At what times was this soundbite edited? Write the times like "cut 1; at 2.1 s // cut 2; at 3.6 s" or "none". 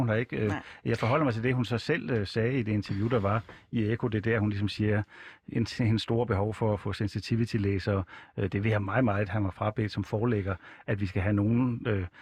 none